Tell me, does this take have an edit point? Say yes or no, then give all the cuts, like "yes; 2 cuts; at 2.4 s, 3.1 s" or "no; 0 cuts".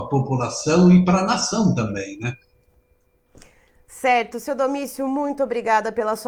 no; 0 cuts